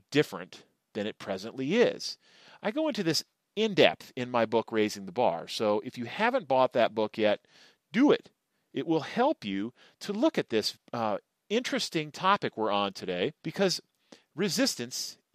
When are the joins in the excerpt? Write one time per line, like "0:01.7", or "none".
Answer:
0:10.7
0:13.4